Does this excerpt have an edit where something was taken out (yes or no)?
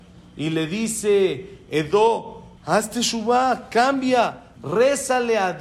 yes